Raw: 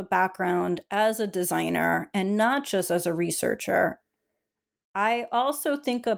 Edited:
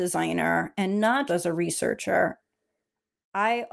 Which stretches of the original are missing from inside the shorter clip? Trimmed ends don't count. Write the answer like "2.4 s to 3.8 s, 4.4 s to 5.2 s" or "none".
2.6 s to 2.9 s